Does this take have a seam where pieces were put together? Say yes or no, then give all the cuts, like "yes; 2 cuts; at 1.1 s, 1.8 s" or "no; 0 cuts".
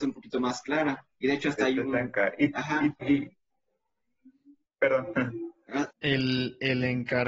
yes; 2 cuts; at 3.0 s, 5.9 s